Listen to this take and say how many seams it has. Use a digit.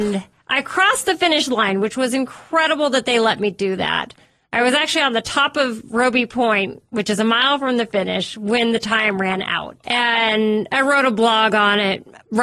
1